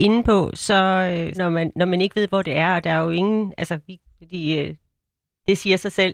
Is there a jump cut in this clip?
yes; 2 cuts; at 1.3 s, 4.1 s

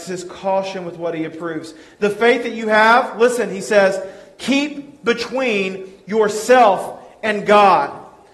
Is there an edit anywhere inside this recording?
no; 0 cuts

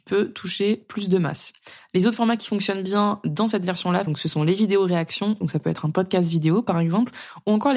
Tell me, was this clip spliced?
yes; 2 cuts; at 4.1 s, 5.4 s

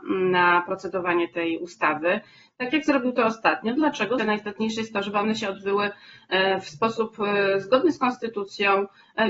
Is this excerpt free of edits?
no; 1 cut; at 4.2 s

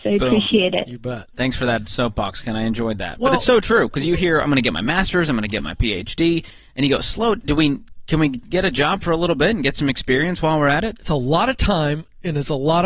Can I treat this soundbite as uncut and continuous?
yes; 0 cuts

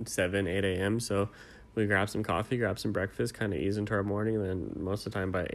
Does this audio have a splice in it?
no; 0 cuts

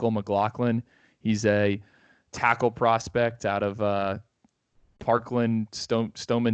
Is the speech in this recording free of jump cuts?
yes; 0 cuts

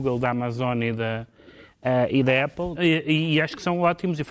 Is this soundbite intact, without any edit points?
no; 1 cut; at 2.7 s

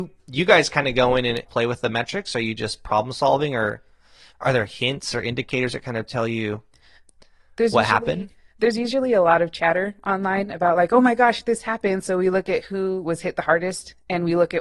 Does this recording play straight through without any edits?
no; 1 cut; at 1.4 s

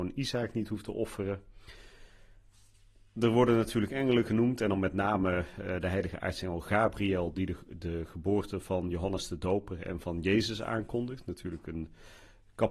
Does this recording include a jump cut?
no; 0 cuts

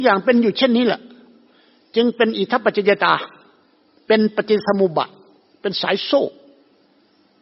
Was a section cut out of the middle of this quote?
no; 0 cuts

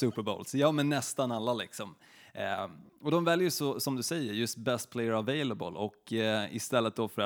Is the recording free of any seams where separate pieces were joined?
yes; 0 cuts

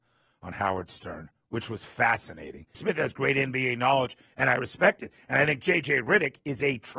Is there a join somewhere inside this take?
yes; 1 cut; at 2.7 s

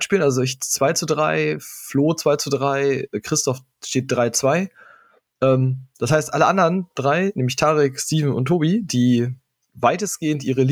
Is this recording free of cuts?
yes; 0 cuts

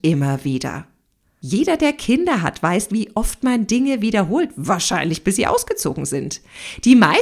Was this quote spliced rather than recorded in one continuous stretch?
no; 0 cuts

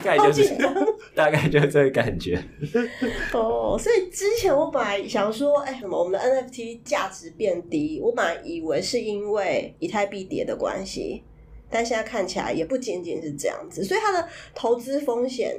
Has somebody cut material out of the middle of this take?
no; 0 cuts

